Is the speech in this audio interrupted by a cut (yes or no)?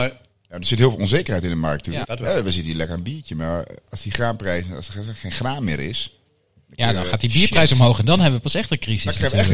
yes